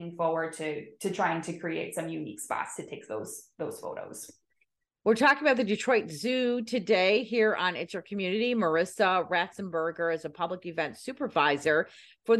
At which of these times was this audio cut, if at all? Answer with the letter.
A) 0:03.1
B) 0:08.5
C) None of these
C